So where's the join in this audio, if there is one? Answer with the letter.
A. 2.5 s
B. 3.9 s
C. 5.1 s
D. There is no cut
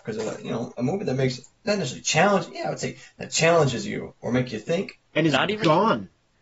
C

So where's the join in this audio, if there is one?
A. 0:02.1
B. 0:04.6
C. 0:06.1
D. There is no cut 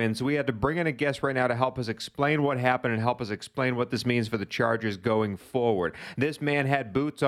D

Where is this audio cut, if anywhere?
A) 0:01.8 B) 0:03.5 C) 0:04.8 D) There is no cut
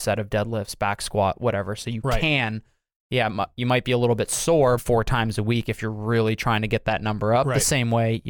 C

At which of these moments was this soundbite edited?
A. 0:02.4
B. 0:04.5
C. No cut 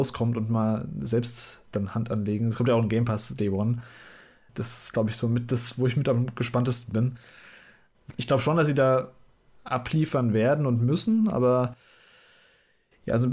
B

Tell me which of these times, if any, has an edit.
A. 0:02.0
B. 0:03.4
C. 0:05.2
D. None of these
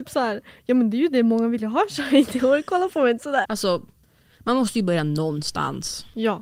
B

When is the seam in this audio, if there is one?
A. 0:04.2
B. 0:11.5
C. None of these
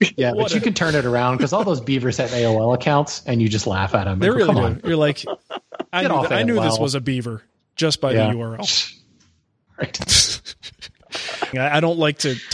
B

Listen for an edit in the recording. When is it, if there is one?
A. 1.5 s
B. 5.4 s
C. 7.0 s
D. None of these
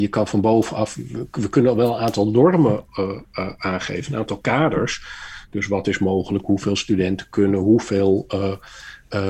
D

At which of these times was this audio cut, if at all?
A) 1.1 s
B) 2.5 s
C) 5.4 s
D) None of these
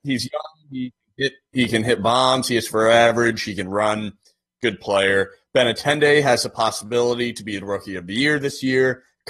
D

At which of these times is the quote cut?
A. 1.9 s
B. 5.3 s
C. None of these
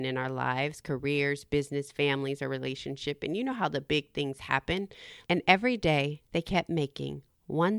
B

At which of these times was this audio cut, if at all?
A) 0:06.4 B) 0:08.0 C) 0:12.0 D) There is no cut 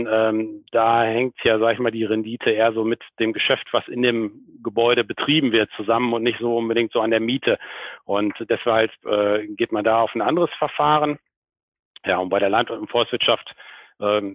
D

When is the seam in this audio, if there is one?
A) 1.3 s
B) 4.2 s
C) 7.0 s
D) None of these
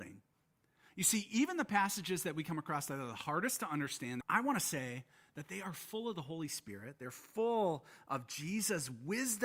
B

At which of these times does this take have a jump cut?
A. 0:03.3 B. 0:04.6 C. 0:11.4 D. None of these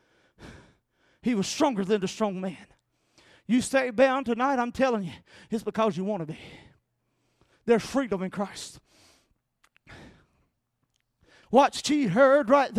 C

